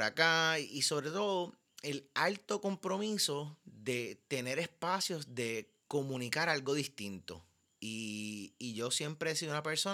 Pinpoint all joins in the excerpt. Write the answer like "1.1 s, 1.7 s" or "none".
none